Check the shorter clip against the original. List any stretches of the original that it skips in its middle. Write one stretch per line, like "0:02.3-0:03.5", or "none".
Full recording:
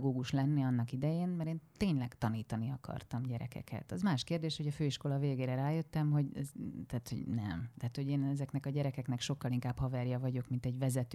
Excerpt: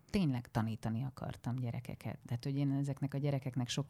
0:03.9-0:07.7